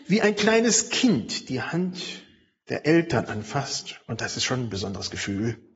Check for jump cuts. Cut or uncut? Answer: uncut